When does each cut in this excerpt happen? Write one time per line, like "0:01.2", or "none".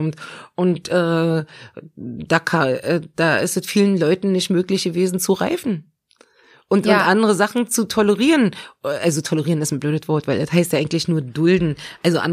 none